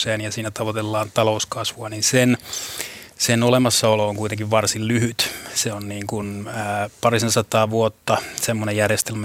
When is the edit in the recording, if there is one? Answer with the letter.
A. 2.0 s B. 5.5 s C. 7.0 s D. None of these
D